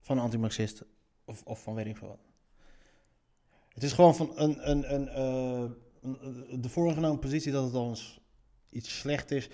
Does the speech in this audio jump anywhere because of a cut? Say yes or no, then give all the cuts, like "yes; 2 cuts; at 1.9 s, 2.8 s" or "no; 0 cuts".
yes; 1 cut; at 1.4 s